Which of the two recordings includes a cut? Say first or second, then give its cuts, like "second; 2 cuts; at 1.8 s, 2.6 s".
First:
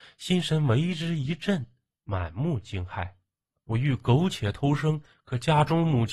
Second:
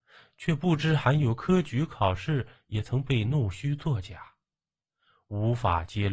first; 1 cut; at 3.5 s